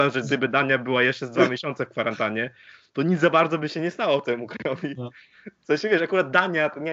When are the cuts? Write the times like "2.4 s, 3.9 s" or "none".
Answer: none